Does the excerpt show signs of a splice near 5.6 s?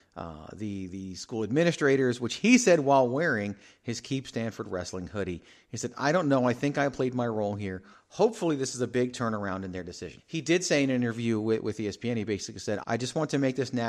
no; 2 cuts; at 10.2 s, 12.8 s

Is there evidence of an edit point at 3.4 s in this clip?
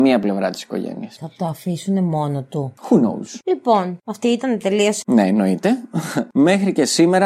no; 2 cuts; at 5.0 s, 6.3 s

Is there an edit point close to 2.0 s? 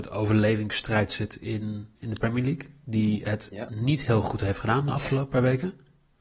yes; 1 cut; at 2.0 s

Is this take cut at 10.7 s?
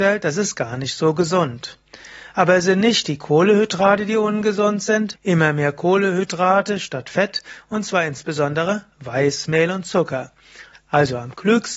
yes; 2 cuts; at 5.1 s, 10.7 s

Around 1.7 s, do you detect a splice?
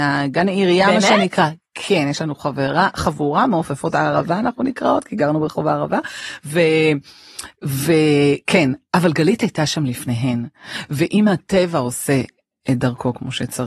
no; 0 cuts

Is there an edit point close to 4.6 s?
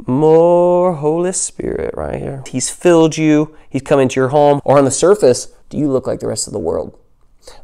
yes; 2 cuts; at 2.5 s, 4.6 s

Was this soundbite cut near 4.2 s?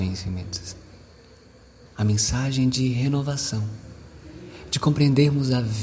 no; 1 cut; at 1.9 s

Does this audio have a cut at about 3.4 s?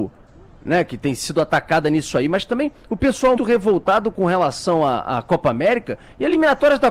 yes; 1 cut; at 3.4 s

